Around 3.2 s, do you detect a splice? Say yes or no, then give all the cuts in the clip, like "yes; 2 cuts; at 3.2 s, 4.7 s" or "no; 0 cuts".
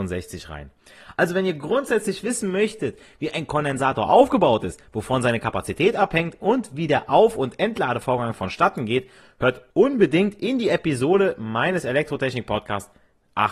no; 2 cuts; at 1.1 s, 9.7 s